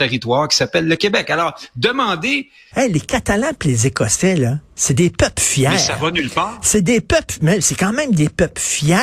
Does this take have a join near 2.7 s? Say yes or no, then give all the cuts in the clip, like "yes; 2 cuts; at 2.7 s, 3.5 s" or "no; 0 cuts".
yes; 1 cut; at 2.7 s